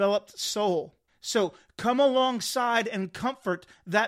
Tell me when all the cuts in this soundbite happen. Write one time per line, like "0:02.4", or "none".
0:01.1